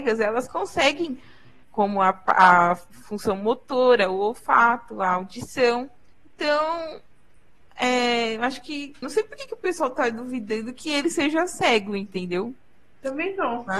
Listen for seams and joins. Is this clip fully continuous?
no; 2 cuts; at 1.6 s, 9.0 s

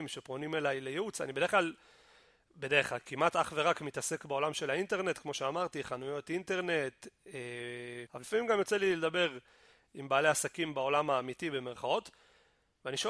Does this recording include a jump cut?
yes; 1 cut; at 8.1 s

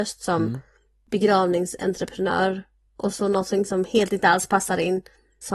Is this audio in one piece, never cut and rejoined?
yes; 0 cuts

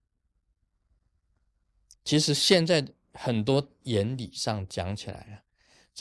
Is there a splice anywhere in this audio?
no; 0 cuts

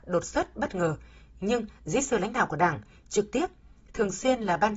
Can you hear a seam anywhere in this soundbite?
no; 0 cuts

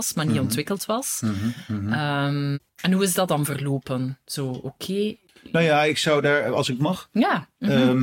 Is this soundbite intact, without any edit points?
yes; 0 cuts

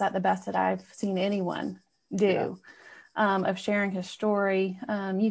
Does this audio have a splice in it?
no; 0 cuts

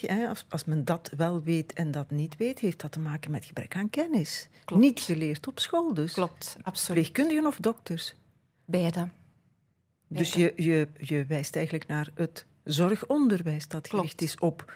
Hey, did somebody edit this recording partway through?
no; 0 cuts

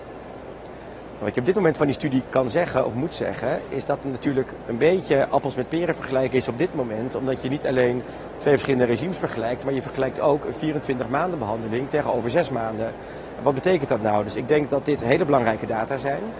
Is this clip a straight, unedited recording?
yes; 0 cuts

